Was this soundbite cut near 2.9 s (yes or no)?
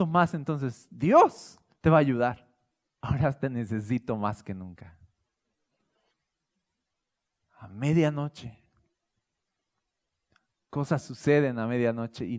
yes